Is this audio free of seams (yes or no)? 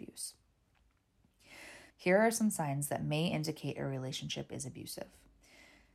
no